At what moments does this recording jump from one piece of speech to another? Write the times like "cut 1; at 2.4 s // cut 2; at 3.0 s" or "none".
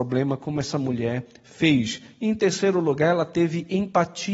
none